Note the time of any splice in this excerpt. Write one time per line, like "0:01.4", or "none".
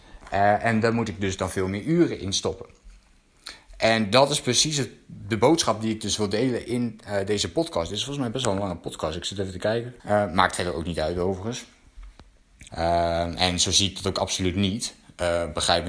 0:10.0
0:12.7